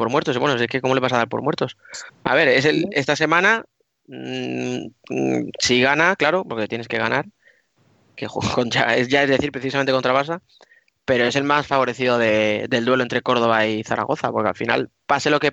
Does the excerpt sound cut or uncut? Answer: cut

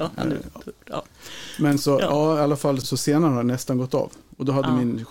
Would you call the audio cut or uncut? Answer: cut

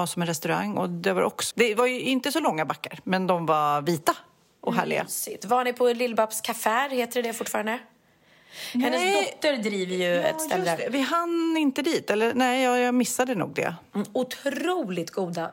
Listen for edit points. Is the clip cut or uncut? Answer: cut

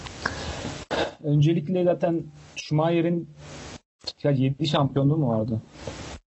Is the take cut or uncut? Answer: uncut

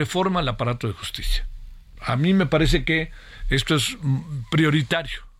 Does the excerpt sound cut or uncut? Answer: uncut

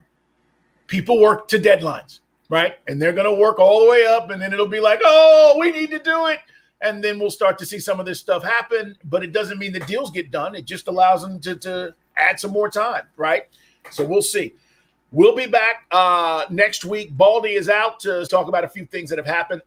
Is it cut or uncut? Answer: cut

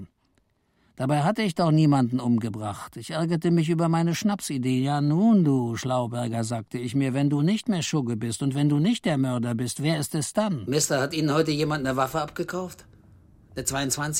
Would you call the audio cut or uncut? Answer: uncut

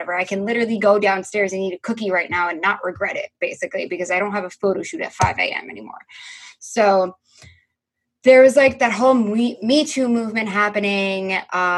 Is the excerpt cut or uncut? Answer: uncut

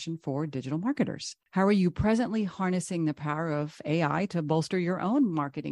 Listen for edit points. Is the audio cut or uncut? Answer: cut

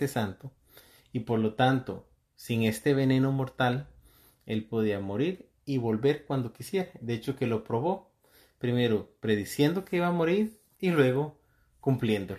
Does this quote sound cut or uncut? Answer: cut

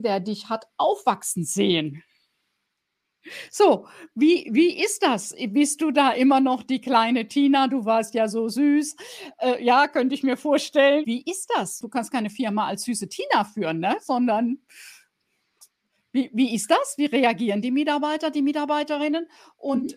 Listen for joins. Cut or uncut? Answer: uncut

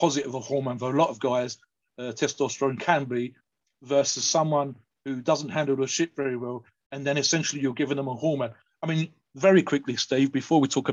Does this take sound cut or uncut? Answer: uncut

